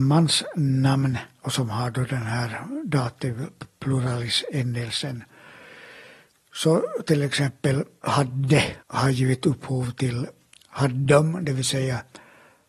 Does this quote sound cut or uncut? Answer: cut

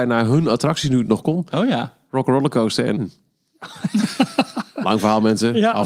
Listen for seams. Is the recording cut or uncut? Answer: cut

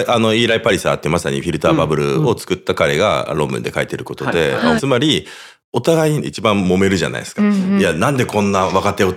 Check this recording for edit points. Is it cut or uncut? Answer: cut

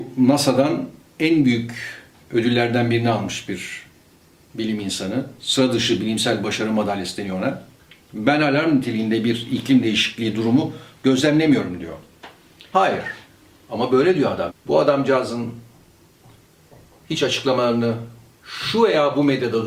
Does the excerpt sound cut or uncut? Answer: cut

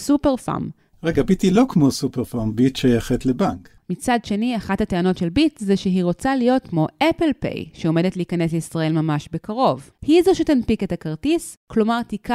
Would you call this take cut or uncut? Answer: cut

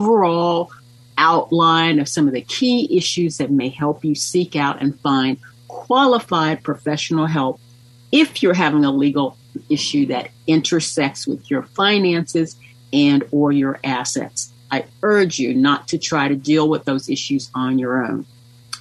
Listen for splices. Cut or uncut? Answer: uncut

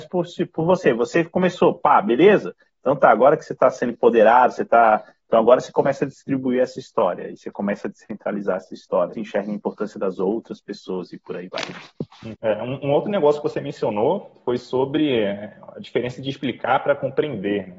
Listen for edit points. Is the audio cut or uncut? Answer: cut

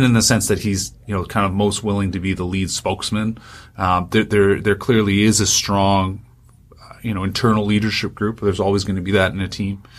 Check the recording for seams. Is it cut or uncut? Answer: uncut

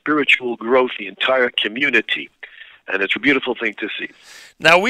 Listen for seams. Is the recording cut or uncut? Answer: cut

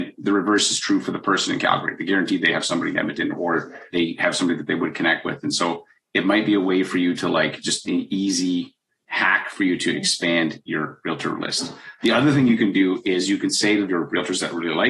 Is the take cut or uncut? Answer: uncut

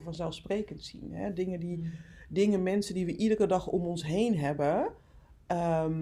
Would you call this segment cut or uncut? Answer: uncut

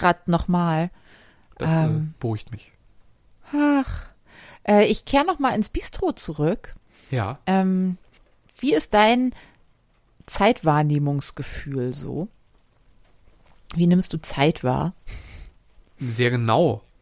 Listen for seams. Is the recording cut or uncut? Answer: uncut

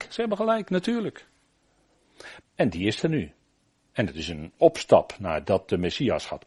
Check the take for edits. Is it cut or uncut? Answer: cut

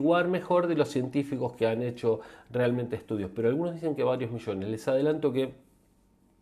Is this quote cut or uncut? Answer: uncut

